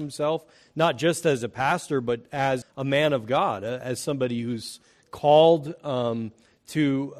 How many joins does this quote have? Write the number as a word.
one